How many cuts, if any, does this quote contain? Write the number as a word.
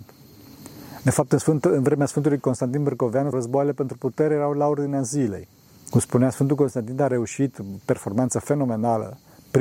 three